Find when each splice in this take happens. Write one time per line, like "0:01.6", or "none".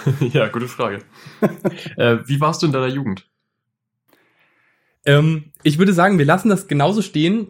0:04.9